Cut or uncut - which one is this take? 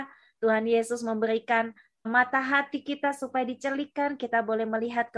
cut